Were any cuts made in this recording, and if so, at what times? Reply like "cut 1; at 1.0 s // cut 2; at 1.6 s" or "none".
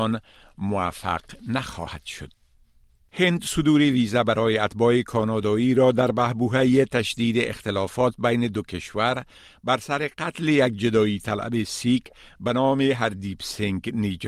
none